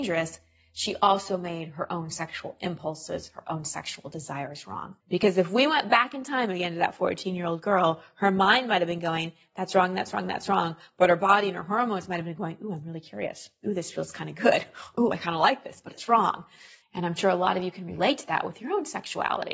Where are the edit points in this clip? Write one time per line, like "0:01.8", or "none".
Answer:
0:05.0
0:16.8